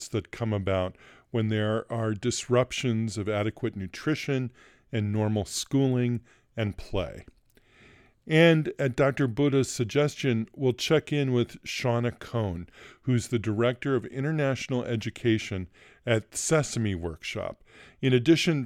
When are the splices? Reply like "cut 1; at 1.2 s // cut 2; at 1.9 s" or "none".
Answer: none